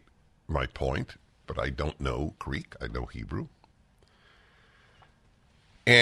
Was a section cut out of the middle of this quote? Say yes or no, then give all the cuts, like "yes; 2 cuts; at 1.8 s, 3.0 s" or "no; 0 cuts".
yes; 1 cut; at 1.4 s